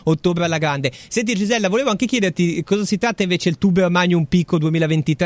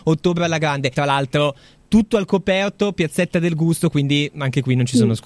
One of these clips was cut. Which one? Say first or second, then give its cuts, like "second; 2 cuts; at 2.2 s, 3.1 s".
second; 1 cut; at 0.9 s